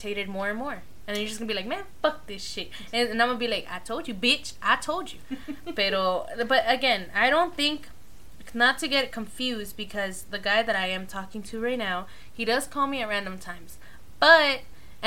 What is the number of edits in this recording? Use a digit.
0